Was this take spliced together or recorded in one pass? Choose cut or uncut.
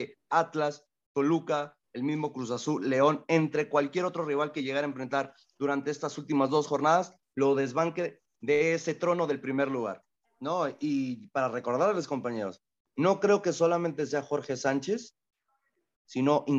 cut